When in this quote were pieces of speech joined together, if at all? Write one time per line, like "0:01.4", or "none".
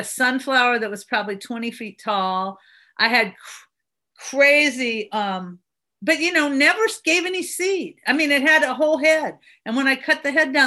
none